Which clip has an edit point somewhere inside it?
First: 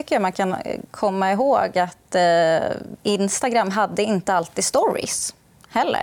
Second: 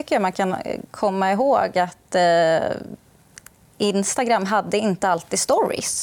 first; 1 cut; at 3.0 s

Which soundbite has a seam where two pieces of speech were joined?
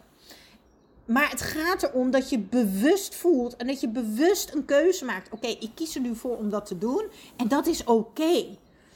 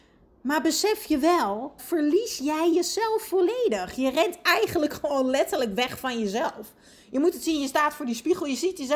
second; 1 cut; at 1.8 s

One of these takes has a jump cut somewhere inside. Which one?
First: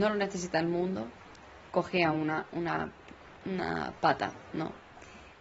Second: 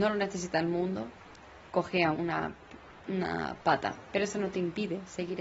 second; 2 cuts; at 2.1 s, 4.1 s

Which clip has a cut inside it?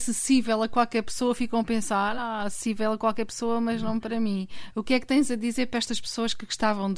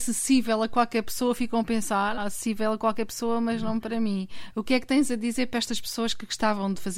second; 1 cut; at 2.2 s

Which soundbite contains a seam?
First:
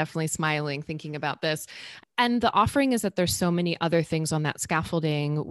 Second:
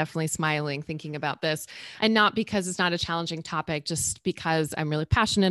first; 1 cut; at 2.0 s

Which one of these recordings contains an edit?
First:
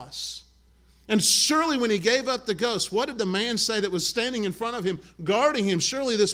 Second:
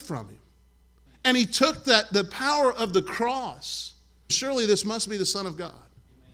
second; 2 cuts; at 1.1 s, 4.3 s

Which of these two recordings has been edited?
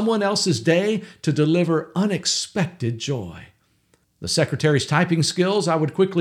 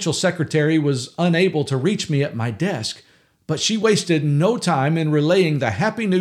first; 1 cut; at 4.0 s

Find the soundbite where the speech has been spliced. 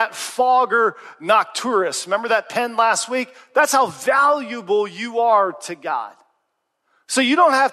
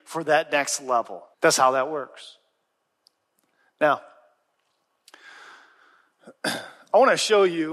second; 1 cut; at 1.3 s

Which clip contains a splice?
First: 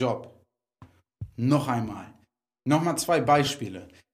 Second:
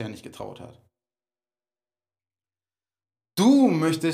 first; 1 cut; at 2.6 s

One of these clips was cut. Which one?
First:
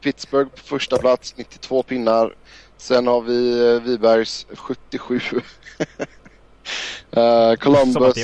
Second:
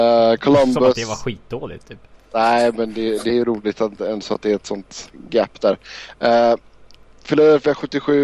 first; 1 cut; at 4.6 s

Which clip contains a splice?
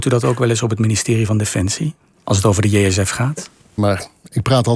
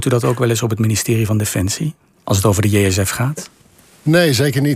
first; 1 cut; at 3.8 s

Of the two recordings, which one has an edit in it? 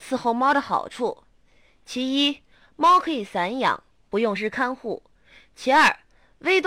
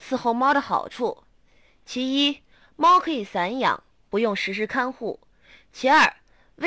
first; 1 cut; at 4.4 s

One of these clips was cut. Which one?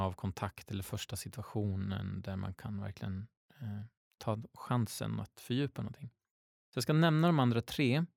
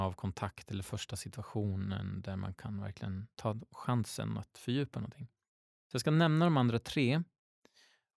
second; 1 cut; at 3.3 s

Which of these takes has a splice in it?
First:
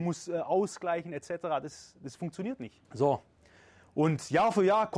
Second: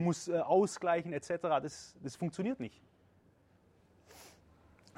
first; 1 cut; at 2.8 s

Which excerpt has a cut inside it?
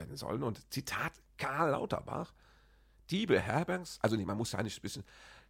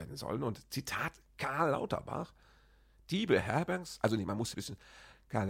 second; 1 cut; at 4.5 s

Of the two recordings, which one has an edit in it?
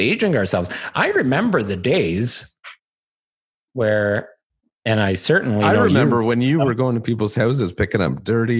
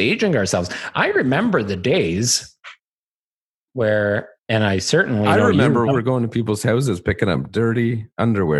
second; 2 cuts; at 4.4 s, 5.9 s

